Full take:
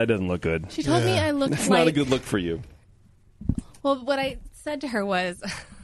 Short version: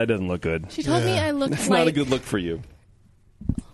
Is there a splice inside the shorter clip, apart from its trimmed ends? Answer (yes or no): no